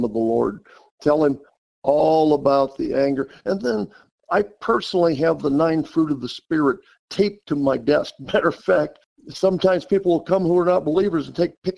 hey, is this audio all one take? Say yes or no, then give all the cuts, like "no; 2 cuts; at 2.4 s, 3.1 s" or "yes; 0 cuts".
yes; 0 cuts